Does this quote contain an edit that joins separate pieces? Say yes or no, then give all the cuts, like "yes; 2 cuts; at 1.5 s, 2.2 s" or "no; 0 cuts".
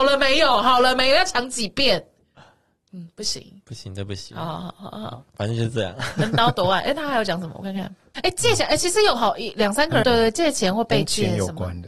yes; 2 cuts; at 8.1 s, 10.0 s